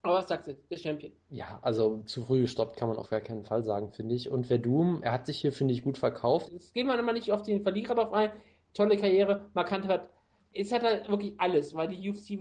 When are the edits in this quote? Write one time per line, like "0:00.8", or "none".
0:01.2
0:06.5